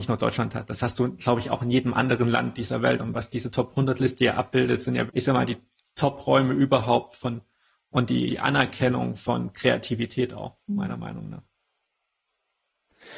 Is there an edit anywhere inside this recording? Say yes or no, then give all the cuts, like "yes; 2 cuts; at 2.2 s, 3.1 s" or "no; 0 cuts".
yes; 2 cuts; at 5.1 s, 8.3 s